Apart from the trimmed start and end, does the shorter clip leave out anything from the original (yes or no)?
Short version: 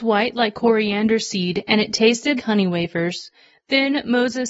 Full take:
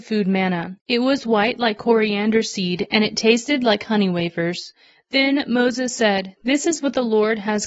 yes